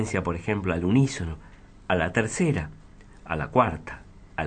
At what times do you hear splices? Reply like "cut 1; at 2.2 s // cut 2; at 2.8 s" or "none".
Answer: none